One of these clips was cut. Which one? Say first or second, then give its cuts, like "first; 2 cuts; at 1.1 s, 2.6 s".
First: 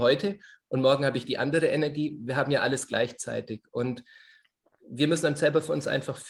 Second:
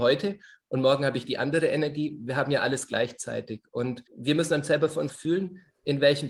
second; 2 cuts; at 4.1 s, 5.1 s